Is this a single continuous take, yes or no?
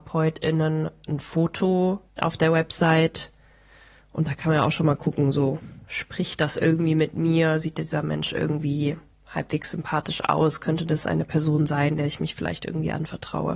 no